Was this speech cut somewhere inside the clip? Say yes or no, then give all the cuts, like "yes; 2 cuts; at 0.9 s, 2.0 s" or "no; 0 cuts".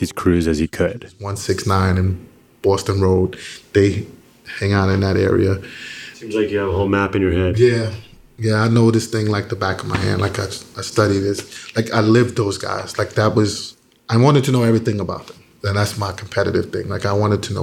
no; 0 cuts